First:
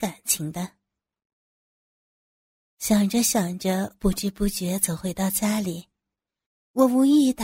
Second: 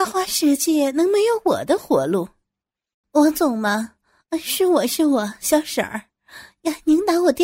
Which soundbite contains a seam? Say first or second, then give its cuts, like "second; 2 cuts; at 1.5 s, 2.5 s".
second; 1 cut; at 3.0 s